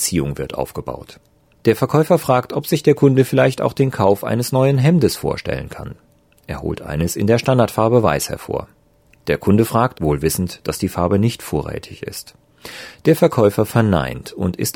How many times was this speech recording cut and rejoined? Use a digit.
1